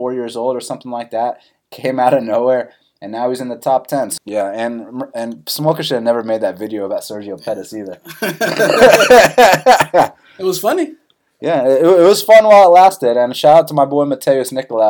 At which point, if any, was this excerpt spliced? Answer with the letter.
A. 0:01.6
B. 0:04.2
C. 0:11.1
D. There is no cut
B